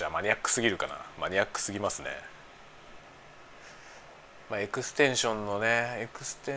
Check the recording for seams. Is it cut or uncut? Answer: uncut